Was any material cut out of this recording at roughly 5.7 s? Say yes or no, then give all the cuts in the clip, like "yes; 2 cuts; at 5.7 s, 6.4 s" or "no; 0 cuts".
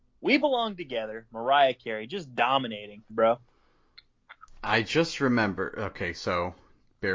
no; 2 cuts; at 3.1 s, 4.5 s